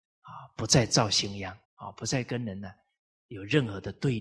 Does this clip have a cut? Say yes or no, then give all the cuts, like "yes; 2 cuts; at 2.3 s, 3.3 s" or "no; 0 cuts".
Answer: yes; 1 cut; at 1.6 s